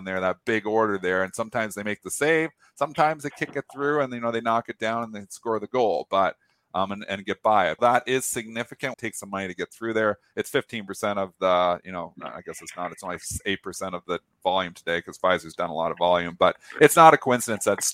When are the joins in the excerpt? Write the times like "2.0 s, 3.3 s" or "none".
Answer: 7.8 s, 8.9 s, 12.1 s